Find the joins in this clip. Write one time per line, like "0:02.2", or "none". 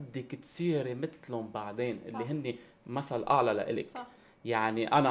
none